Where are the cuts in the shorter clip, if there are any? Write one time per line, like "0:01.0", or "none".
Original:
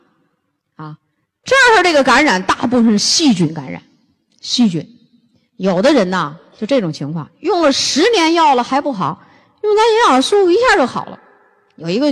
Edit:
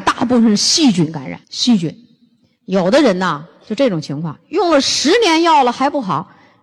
0:01.4